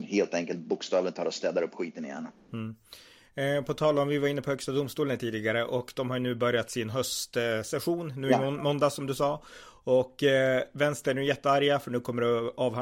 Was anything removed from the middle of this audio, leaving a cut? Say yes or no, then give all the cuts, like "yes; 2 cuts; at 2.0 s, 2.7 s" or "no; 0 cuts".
no; 0 cuts